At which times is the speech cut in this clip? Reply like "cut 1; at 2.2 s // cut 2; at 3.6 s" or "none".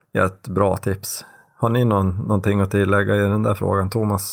none